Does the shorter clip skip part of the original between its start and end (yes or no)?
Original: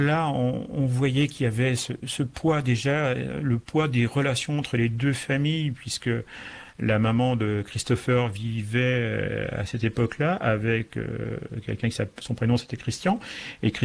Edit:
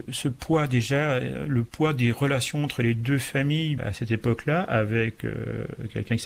yes